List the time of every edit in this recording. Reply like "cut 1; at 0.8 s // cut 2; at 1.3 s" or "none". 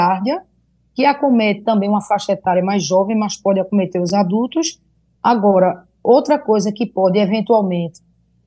cut 1; at 5.2 s

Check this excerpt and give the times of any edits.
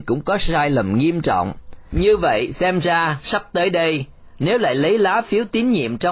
cut 1; at 1.9 s

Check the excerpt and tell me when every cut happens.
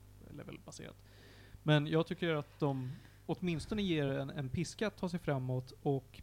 none

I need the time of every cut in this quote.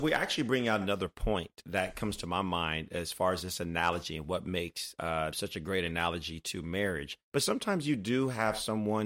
cut 1; at 5.3 s // cut 2; at 7.3 s

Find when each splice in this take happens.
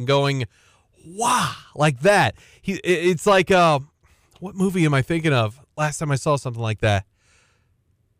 none

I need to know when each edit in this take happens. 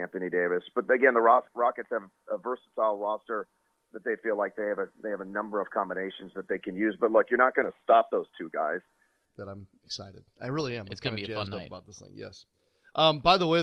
cut 1; at 9.2 s

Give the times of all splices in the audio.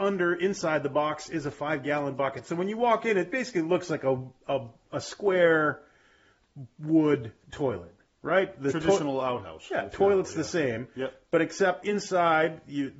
cut 1; at 11.8 s

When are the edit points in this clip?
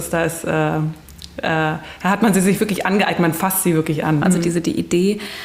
cut 1; at 4.2 s

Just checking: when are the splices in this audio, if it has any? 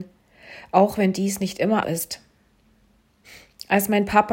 cut 1; at 1.8 s

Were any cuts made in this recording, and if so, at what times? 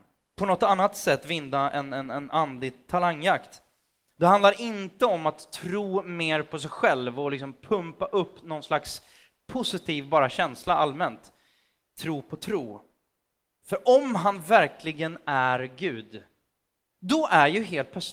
cut 1; at 13.6 s

